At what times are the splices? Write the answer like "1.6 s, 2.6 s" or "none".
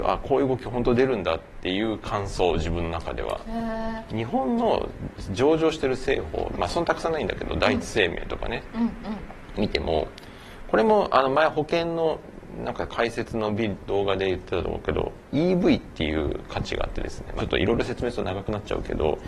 4.1 s, 6.5 s, 17.4 s